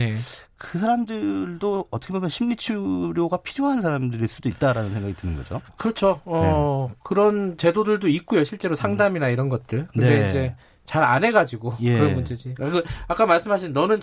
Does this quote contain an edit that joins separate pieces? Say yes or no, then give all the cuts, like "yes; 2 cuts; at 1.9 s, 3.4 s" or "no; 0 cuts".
no; 0 cuts